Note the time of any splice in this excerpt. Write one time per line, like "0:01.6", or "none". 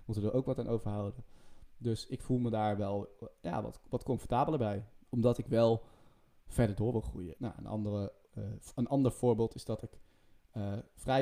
0:05.1
0:07.4